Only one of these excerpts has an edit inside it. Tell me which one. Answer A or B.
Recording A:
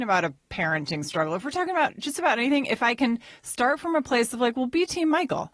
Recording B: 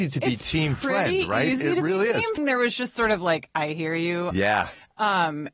B